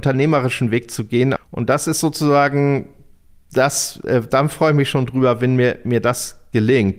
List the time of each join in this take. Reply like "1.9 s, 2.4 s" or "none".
1.4 s